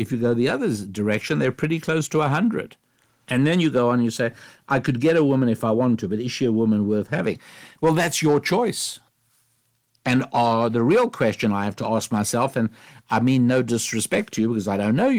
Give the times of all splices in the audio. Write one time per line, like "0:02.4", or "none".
0:03.3

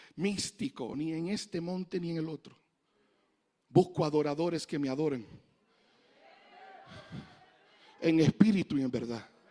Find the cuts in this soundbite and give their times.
0:00.9

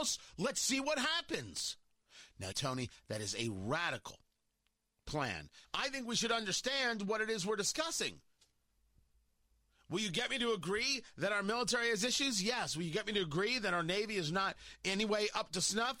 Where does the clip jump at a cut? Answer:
0:02.5
0:05.6

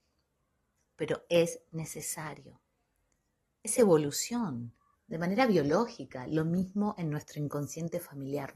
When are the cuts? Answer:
0:04.9

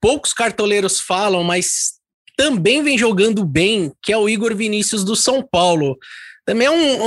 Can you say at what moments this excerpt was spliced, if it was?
none

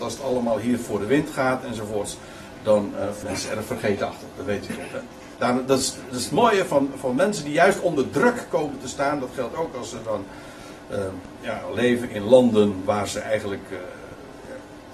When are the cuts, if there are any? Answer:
0:03.2
0:05.4

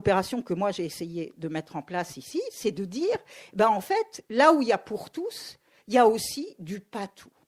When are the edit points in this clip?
none

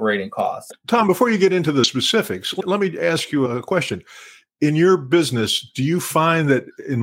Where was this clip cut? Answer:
none

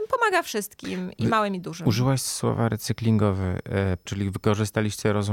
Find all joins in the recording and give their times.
0:04.1

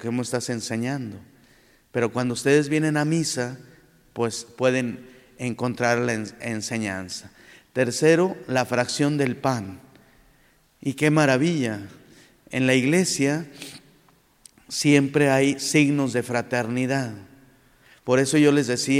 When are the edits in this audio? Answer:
none

